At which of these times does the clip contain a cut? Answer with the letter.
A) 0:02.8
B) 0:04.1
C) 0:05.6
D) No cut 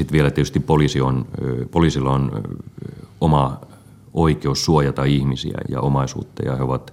C